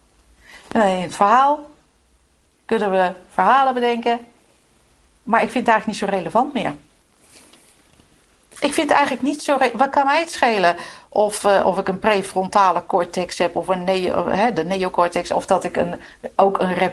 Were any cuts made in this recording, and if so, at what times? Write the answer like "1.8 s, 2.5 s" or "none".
none